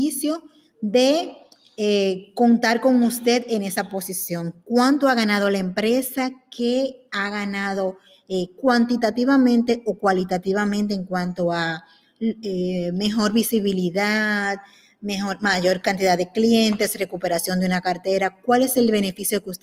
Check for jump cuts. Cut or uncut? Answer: uncut